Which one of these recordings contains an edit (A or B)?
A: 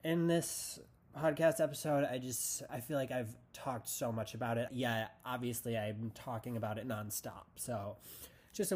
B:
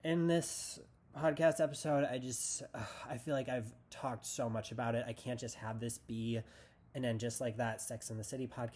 A